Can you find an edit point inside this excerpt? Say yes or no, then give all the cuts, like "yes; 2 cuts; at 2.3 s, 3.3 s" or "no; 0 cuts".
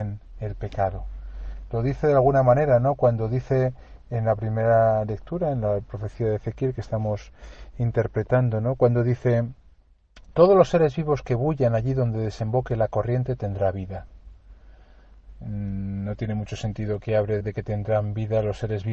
yes; 1 cut; at 17.4 s